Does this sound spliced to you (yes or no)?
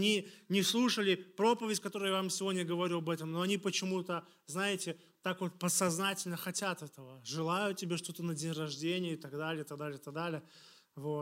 no